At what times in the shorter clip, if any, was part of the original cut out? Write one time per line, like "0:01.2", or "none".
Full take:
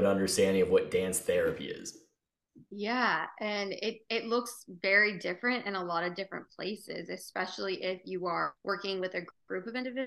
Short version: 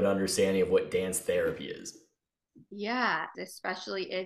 0:03.3